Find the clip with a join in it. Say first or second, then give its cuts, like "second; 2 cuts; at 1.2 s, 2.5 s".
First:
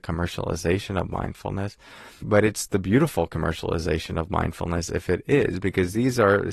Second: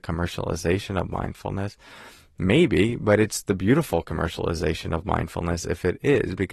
first; 1 cut; at 2.2 s